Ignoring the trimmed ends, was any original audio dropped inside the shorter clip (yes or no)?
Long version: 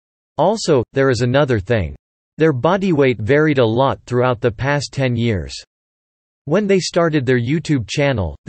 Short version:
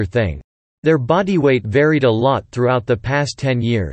no